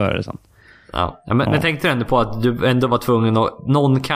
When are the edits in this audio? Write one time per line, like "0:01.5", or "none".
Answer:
none